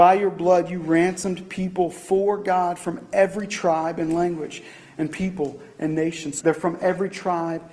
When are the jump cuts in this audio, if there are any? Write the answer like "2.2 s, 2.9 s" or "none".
6.4 s